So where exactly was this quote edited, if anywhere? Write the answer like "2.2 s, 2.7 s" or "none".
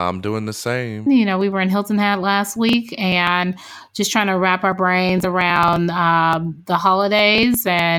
1.1 s